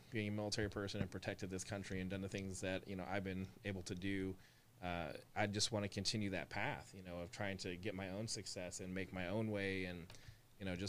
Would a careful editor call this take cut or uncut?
cut